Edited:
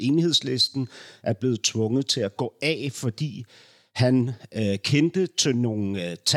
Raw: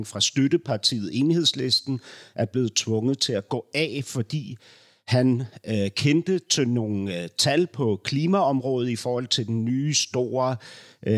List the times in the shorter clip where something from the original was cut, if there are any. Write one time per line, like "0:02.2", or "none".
none